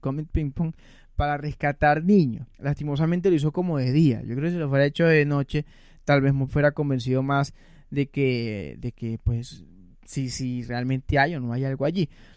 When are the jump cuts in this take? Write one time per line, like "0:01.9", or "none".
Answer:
0:02.5